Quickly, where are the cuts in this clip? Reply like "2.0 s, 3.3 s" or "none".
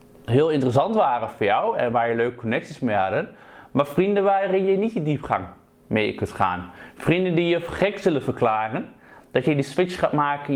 none